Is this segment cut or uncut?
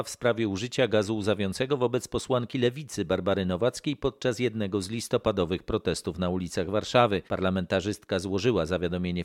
cut